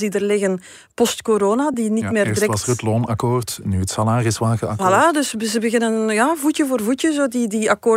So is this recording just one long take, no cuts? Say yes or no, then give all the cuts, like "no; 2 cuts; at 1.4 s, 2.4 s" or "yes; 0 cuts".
yes; 0 cuts